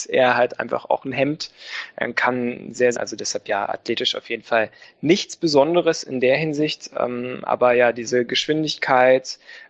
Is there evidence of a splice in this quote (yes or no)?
yes